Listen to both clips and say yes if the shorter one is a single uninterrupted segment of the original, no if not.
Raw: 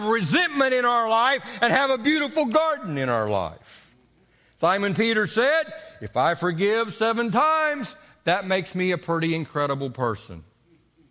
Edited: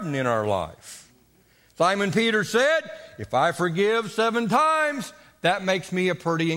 yes